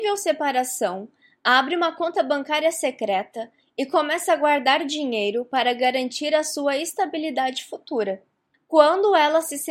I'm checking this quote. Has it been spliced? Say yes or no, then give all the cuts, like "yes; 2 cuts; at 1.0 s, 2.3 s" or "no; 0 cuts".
yes; 1 cut; at 8.5 s